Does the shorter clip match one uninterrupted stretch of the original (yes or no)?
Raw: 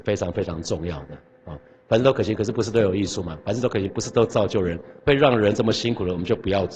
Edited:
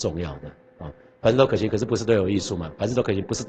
yes